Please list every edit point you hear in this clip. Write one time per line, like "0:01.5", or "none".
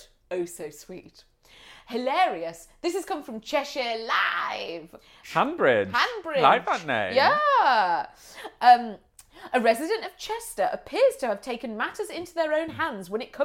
0:05.2